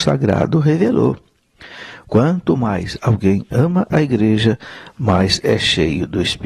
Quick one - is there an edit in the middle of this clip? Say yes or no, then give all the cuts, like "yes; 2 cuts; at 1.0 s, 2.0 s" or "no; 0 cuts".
yes; 1 cut; at 2.1 s